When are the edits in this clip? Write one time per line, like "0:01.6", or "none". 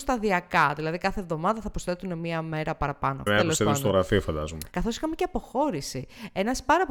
0:03.3
0:04.7